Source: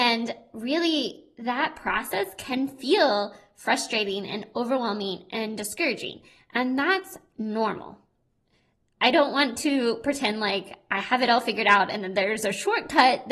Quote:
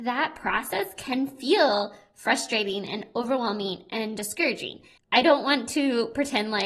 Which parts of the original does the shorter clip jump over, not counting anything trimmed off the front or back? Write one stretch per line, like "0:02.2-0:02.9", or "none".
0:06.4-0:08.9

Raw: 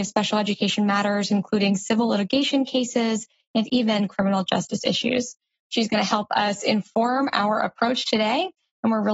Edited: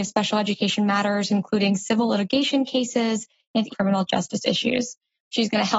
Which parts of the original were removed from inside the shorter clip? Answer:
0:03.7-0:04.1

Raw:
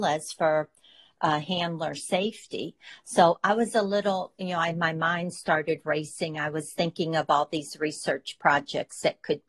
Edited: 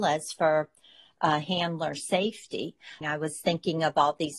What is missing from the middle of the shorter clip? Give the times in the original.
0:03.0-0:06.3

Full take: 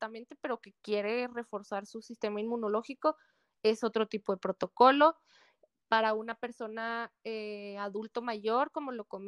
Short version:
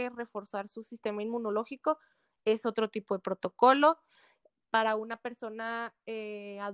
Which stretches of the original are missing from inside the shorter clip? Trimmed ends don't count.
none

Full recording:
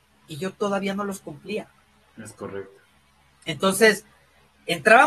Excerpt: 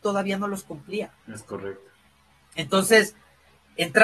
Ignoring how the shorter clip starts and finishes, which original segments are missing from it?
0:01.8-0:02.1

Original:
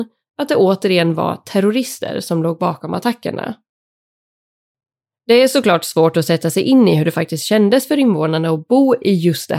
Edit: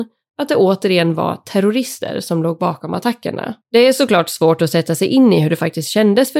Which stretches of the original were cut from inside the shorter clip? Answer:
0:03.6-0:05.2

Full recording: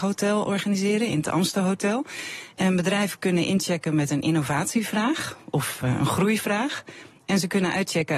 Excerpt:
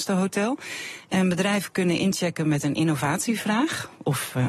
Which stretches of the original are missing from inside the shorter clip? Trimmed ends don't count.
none

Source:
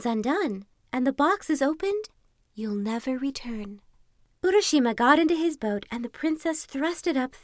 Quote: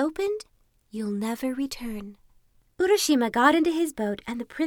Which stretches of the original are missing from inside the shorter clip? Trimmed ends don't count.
none

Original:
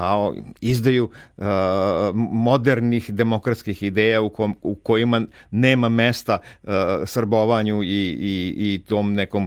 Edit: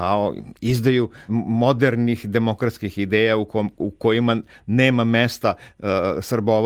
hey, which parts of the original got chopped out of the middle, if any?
0:01.3-0:02.1

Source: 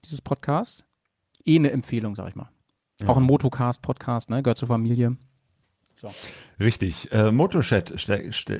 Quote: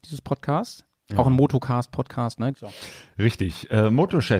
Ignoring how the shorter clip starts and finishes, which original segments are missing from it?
0:01.0-0:02.9
0:04.4-0:05.9

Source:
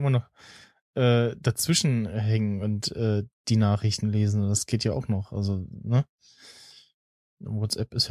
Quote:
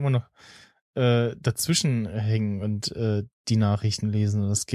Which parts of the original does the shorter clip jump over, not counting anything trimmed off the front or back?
none

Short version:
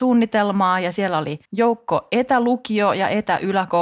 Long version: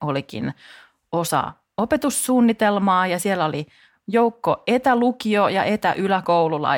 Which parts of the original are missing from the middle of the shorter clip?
0:03.7-0:04.0

